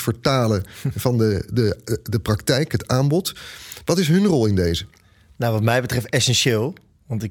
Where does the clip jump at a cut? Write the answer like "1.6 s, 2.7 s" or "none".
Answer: none